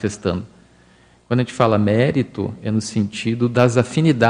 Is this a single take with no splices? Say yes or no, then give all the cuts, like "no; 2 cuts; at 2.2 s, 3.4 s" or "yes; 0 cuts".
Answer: yes; 0 cuts